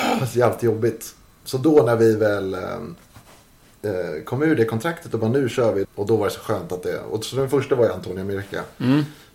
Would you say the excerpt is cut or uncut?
cut